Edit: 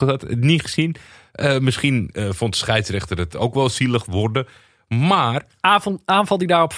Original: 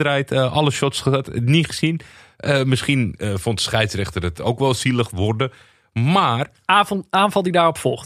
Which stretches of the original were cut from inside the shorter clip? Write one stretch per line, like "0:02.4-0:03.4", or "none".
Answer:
none

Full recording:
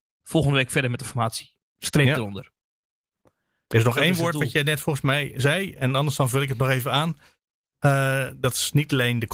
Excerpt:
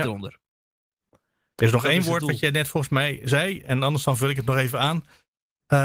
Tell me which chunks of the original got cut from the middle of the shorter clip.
none

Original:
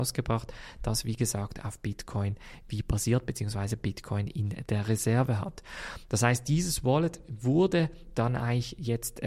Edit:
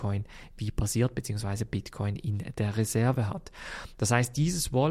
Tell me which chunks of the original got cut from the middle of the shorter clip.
none

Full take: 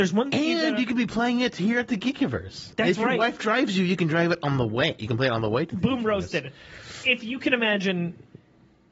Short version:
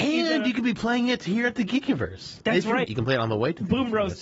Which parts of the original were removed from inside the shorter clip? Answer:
0:03.2-0:05.0

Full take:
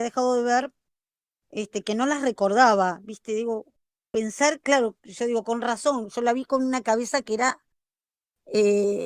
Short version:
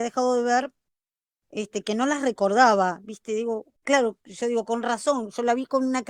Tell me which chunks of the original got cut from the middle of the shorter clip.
0:03.8-0:04.6

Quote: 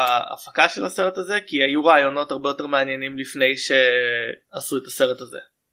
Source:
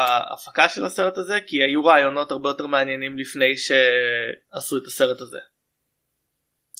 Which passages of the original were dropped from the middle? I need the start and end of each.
none

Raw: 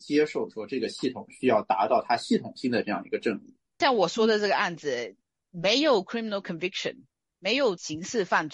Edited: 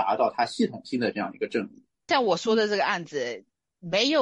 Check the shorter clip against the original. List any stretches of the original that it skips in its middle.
none

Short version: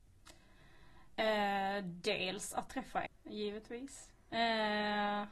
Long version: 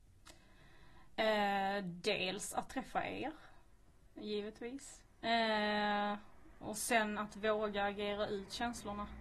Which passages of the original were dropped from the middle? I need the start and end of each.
0:03.1-0:04.0

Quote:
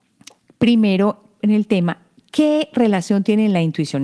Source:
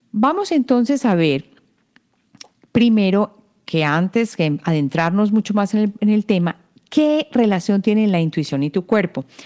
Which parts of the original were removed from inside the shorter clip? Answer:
0:03.5-0:06.0

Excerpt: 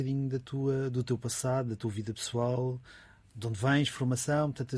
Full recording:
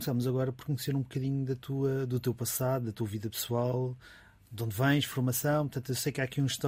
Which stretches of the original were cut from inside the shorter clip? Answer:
none

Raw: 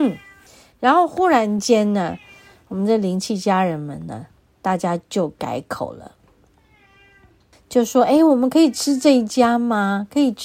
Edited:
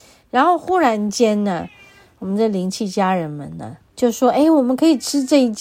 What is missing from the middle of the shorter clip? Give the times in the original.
0:04.4-0:07.6

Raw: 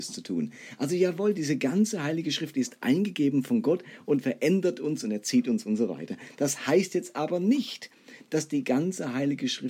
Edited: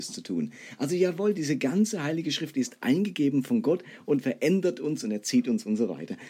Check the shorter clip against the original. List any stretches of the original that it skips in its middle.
none

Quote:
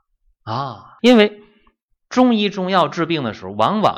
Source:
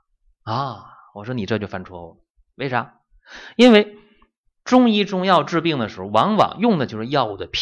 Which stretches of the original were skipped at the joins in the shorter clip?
0:01.0-0:03.5

